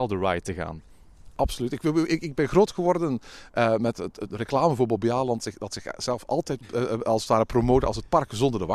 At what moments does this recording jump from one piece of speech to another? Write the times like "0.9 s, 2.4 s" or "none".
4.3 s